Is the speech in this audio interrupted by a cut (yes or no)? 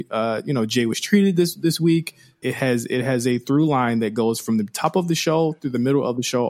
yes